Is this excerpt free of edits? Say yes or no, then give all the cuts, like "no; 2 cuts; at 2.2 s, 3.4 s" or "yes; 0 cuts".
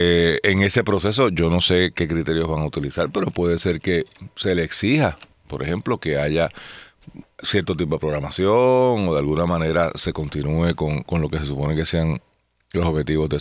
yes; 0 cuts